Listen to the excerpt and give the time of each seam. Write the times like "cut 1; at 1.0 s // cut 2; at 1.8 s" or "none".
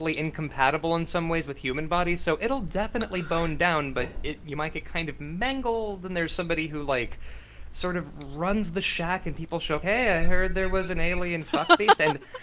cut 1; at 9.8 s

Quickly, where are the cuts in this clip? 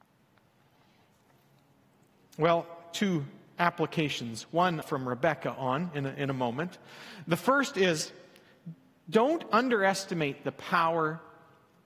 cut 1; at 4.8 s

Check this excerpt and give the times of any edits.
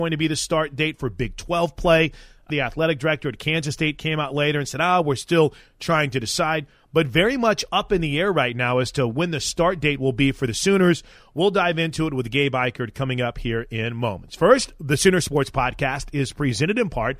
cut 1; at 2.5 s

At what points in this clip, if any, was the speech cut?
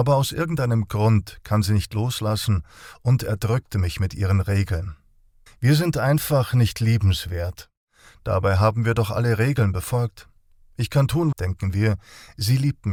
cut 1; at 5.5 s // cut 2; at 11.3 s

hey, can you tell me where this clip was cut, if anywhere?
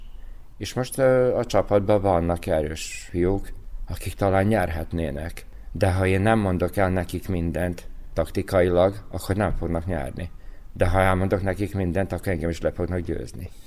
none

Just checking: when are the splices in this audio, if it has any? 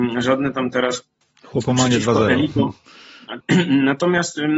cut 1; at 3.4 s

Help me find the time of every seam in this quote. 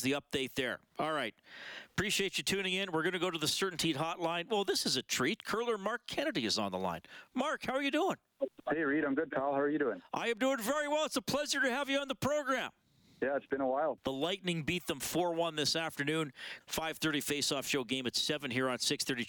cut 1; at 14.0 s // cut 2; at 16.6 s

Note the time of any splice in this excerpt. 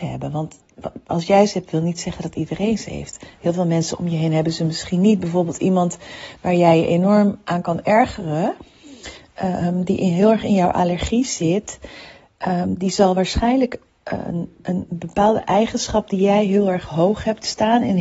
none

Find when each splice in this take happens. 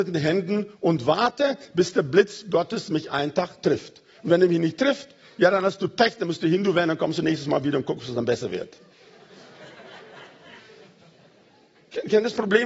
none

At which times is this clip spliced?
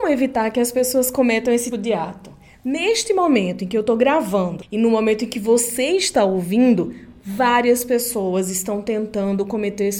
cut 1; at 1.7 s

